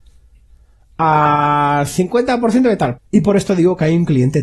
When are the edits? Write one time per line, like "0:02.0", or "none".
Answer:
0:03.0